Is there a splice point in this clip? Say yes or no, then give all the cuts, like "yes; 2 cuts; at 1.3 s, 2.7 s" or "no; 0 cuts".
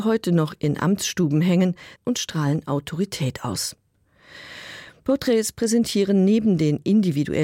yes; 1 cut; at 1.9 s